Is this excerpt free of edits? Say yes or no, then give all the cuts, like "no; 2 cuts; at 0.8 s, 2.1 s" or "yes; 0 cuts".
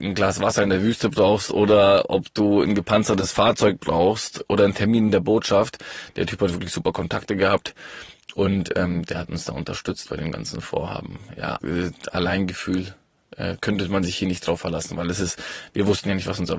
no; 2 cuts; at 11.6 s, 13.6 s